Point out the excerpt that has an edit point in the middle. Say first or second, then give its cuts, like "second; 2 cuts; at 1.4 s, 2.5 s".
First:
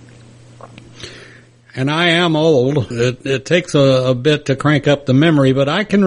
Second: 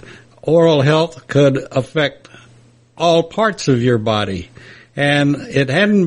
first; 1 cut; at 2.9 s